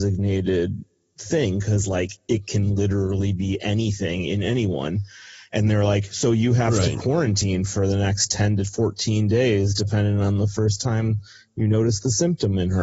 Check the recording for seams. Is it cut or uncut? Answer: uncut